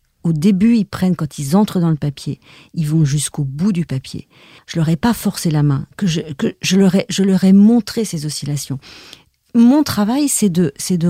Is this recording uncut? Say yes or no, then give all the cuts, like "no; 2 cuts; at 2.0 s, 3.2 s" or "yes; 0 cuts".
no; 1 cut; at 4.6 s